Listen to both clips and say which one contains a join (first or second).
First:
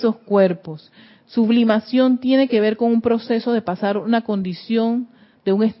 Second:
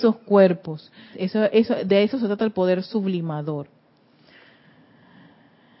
second